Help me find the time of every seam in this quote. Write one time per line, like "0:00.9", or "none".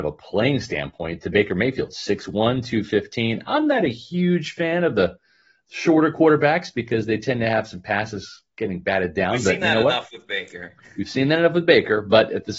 none

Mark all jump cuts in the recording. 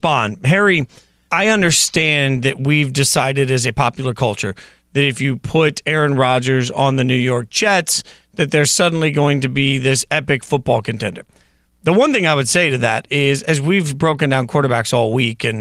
0:01.3

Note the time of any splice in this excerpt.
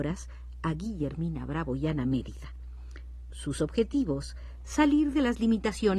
0:03.3

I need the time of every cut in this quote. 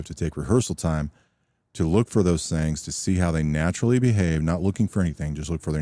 none

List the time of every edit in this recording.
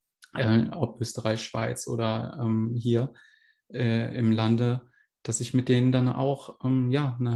none

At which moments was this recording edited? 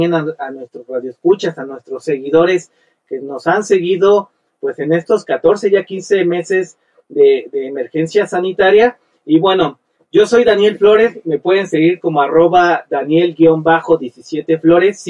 none

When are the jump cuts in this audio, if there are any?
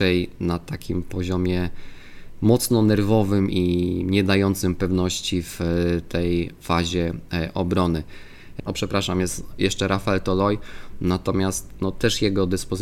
0:03.5
0:08.6

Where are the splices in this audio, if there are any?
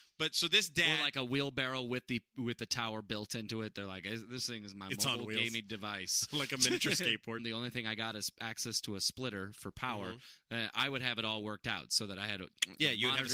0:07.4

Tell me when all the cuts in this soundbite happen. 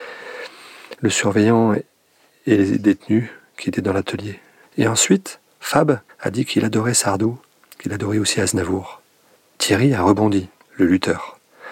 0:04.6
0:06.1

